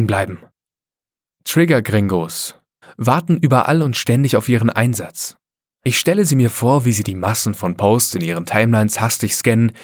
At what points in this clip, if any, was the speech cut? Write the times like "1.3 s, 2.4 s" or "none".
2.8 s